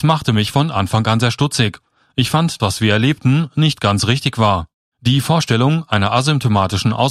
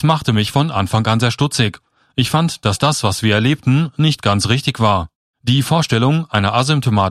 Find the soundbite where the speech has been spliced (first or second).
first